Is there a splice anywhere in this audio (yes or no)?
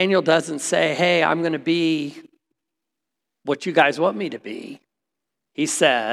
no